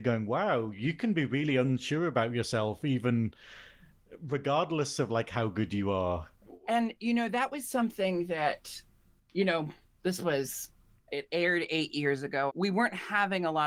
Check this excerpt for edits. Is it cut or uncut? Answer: cut